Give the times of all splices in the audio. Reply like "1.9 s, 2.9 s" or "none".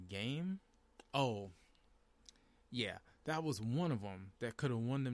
none